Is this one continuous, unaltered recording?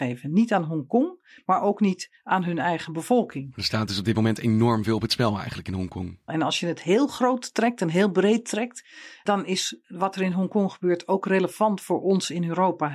no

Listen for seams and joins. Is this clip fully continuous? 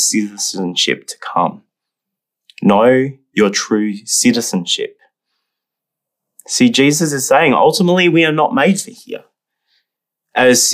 yes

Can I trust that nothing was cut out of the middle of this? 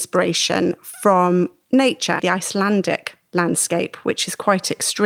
no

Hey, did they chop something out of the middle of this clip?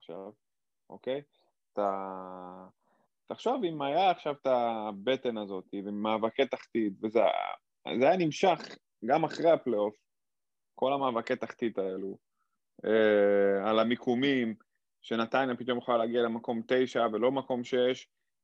yes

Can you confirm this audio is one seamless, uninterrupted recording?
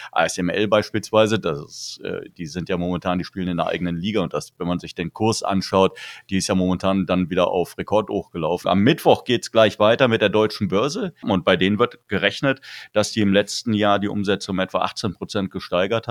no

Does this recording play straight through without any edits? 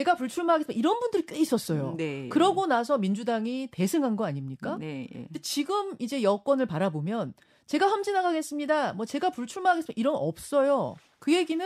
yes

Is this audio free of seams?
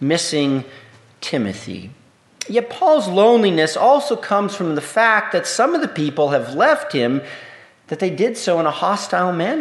yes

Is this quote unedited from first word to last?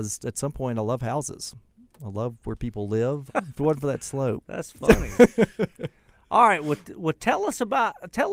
no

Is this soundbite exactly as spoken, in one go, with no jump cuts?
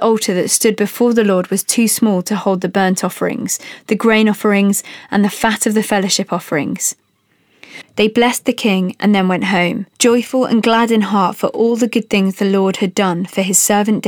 no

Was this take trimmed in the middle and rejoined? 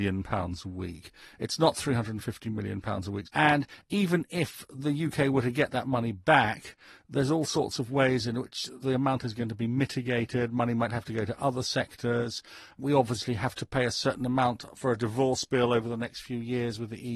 yes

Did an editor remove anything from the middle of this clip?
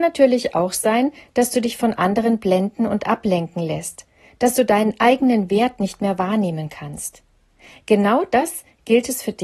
no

